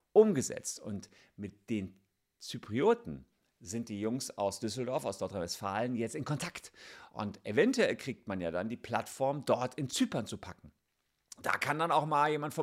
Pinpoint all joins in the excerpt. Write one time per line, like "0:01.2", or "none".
none